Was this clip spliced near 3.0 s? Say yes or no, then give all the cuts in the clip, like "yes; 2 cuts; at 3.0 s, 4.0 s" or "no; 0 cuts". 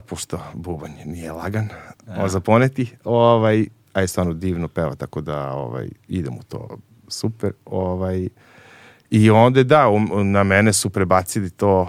no; 0 cuts